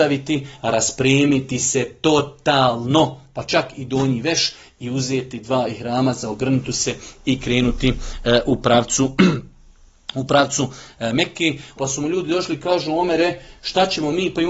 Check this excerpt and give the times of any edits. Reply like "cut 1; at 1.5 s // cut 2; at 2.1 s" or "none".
cut 1; at 11.8 s

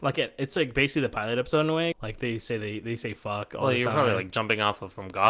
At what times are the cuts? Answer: cut 1; at 1.9 s

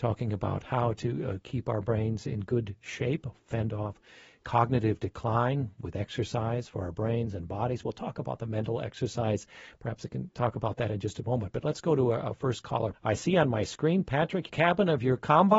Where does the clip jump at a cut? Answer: cut 1; at 12.9 s // cut 2; at 14.5 s

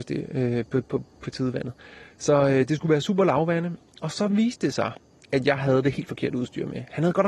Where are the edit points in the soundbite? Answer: none

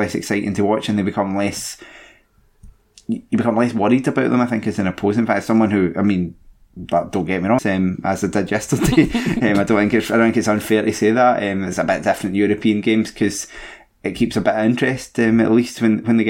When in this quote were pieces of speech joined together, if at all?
cut 1; at 7.6 s

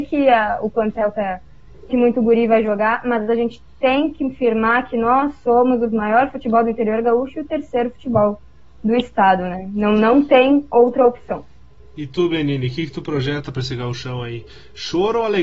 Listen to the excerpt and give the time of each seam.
cut 1; at 1.9 s

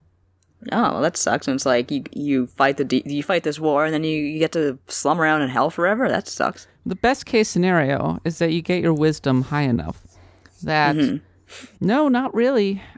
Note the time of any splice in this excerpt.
cut 1; at 11.8 s

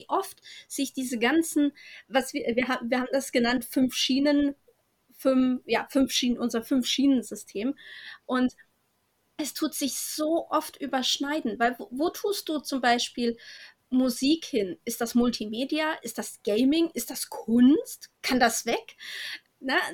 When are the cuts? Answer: none

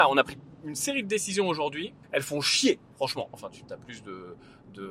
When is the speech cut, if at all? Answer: cut 1; at 2.0 s // cut 2; at 3.3 s

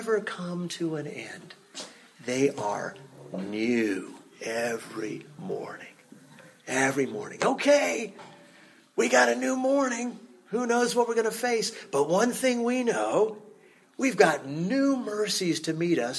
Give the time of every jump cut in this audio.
none

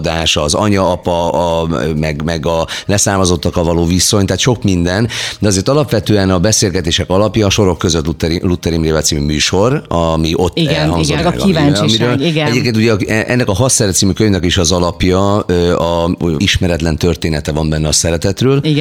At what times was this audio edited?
cut 1; at 11.2 s // cut 2; at 16.4 s

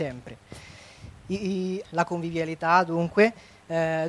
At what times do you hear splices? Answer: cut 1; at 1.8 s

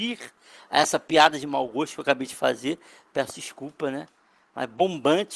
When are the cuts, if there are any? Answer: none

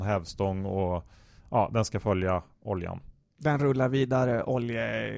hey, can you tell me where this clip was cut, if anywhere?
none

